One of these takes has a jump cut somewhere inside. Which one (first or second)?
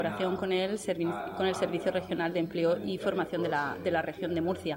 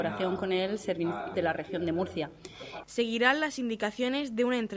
second